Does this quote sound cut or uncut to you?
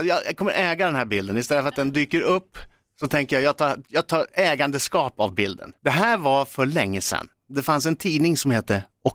cut